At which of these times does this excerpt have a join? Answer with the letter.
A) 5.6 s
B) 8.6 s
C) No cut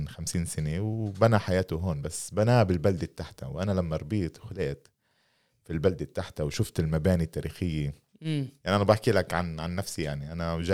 B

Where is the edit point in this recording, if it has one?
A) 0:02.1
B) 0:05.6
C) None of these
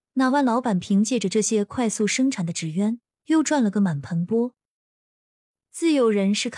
C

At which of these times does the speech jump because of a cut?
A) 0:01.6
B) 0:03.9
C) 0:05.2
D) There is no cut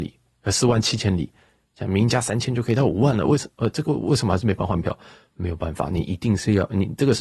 B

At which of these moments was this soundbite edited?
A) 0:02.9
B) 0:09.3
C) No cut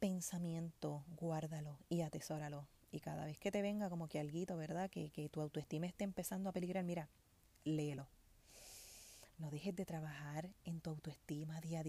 B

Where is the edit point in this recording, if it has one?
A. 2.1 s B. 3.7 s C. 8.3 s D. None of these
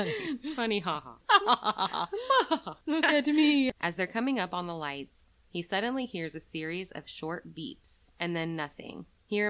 B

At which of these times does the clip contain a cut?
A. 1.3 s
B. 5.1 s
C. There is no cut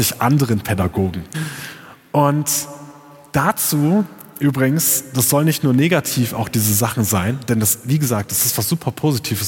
A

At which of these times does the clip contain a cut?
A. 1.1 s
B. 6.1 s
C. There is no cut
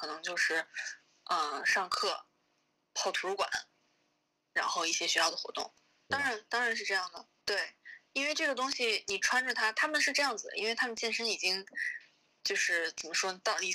B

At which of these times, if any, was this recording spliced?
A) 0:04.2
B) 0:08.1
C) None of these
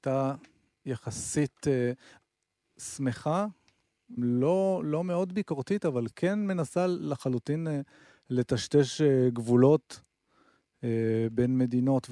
A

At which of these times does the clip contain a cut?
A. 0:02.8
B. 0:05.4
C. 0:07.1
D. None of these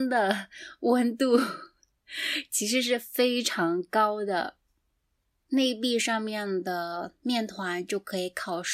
B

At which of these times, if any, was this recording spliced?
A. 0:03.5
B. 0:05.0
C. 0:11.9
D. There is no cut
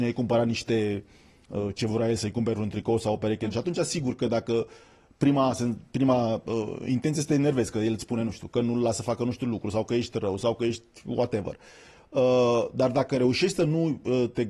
A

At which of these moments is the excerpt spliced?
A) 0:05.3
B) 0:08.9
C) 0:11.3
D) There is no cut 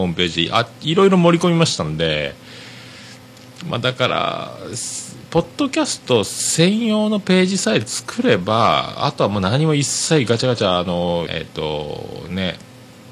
C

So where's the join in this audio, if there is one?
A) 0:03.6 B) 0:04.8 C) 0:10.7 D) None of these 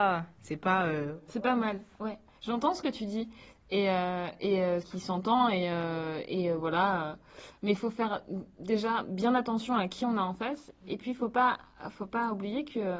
B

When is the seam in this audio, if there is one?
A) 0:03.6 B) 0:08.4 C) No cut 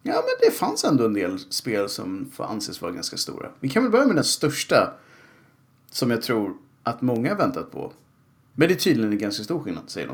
B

